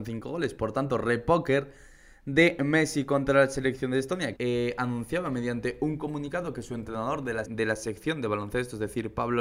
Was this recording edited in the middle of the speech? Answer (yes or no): yes